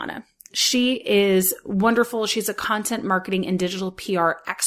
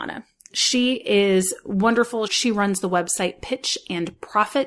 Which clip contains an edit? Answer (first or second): second